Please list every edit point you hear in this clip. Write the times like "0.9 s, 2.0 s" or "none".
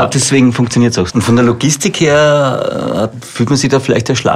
1.1 s